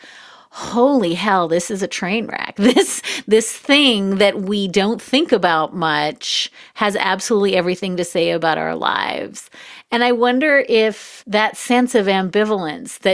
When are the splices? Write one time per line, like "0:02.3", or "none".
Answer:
0:02.6
0:11.2